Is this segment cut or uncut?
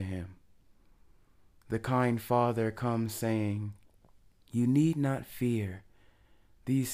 uncut